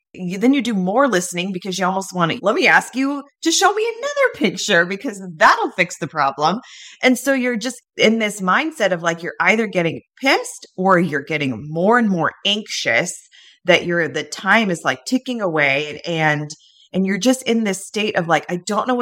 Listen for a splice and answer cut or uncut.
cut